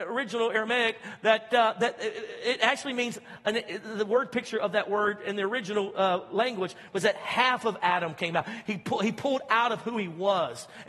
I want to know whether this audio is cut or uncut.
uncut